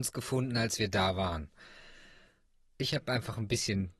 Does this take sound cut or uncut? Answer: uncut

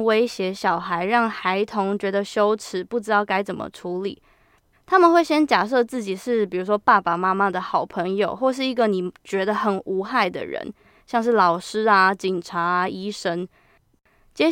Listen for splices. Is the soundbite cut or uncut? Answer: cut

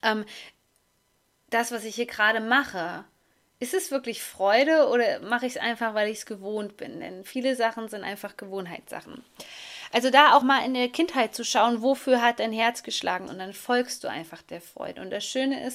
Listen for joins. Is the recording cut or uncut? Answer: cut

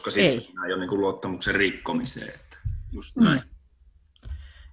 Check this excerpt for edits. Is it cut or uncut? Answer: uncut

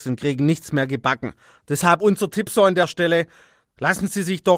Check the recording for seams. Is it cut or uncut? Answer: uncut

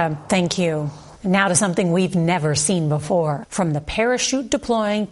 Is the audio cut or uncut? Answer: cut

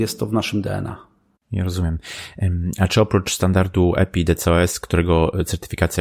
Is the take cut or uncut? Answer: uncut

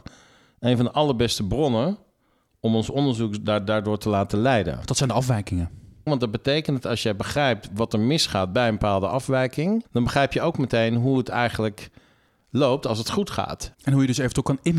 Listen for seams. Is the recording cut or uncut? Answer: cut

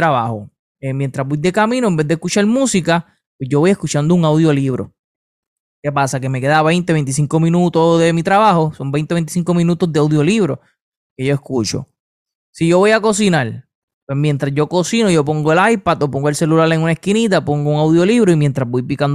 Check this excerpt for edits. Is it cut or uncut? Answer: uncut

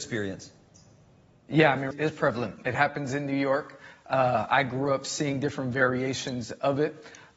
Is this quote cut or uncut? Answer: cut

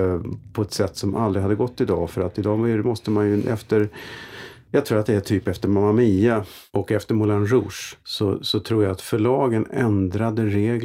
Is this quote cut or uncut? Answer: cut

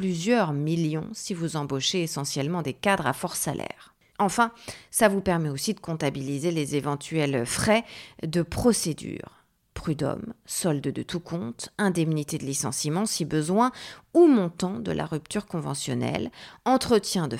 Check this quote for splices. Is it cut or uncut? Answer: cut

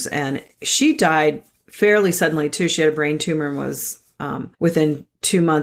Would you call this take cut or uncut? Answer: cut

